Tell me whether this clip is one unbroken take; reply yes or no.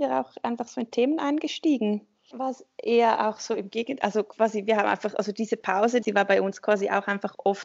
no